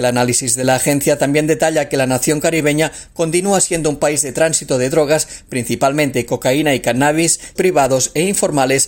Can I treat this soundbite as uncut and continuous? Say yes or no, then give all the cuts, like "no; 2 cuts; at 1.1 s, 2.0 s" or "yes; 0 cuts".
no; 1 cut; at 7.6 s